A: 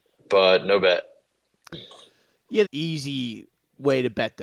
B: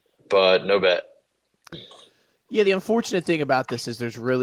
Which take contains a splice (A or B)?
A